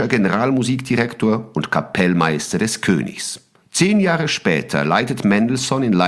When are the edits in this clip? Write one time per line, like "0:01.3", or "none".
0:03.6